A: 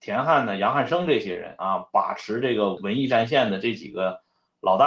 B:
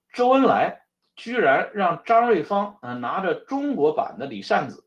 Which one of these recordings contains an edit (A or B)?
A